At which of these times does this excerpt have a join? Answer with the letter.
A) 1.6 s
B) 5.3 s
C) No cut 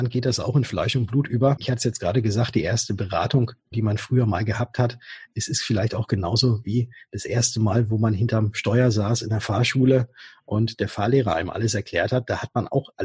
C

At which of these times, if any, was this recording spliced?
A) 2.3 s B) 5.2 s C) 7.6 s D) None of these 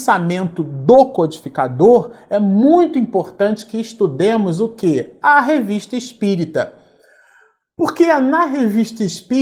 D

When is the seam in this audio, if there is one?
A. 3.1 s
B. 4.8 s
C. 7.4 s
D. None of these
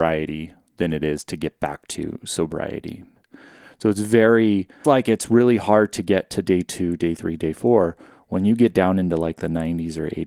B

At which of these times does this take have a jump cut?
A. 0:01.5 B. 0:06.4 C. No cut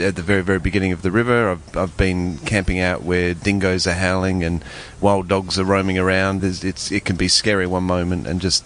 B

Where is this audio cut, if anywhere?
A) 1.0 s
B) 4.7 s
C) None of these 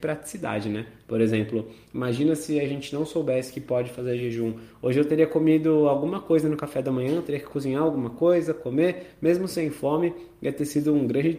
C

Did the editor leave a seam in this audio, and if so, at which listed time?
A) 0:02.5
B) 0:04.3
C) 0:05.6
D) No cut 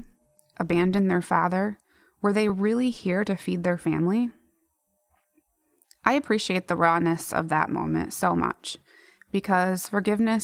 D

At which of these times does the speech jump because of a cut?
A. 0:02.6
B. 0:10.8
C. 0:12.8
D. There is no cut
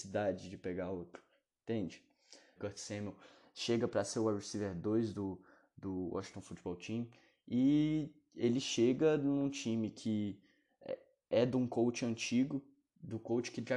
A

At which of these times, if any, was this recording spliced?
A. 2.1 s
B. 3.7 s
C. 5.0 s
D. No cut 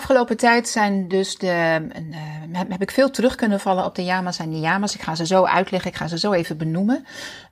D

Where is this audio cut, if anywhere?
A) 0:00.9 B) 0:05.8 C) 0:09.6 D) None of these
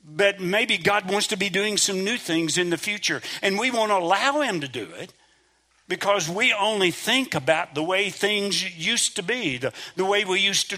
D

